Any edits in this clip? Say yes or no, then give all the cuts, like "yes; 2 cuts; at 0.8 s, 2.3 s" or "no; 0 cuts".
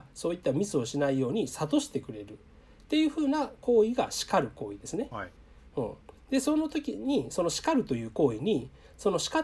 no; 0 cuts